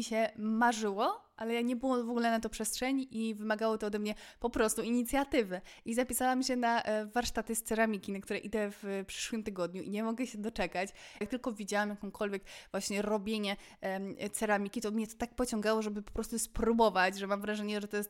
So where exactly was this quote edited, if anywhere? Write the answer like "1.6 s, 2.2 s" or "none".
11.2 s